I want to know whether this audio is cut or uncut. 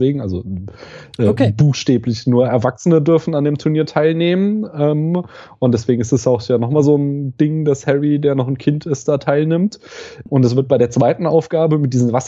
cut